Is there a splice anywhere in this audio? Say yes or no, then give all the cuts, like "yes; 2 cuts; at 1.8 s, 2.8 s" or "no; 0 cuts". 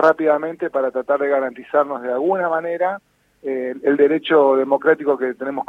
no; 0 cuts